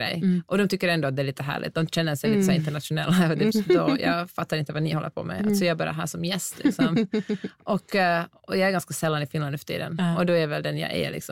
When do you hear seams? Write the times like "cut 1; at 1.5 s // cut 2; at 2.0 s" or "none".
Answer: cut 1; at 3.5 s